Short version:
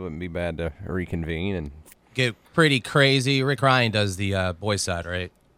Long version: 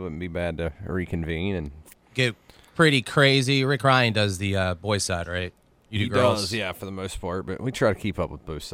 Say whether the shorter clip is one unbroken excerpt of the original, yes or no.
no